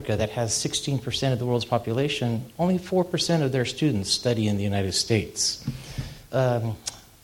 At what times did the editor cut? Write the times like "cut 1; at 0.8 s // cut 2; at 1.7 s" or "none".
cut 1; at 6.3 s